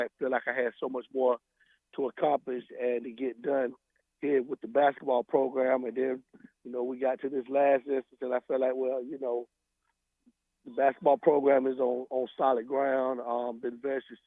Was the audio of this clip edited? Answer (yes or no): no